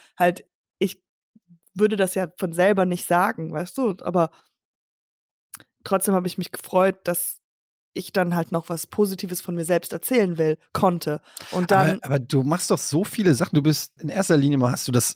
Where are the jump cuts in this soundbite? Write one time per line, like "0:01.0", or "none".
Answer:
0:14.0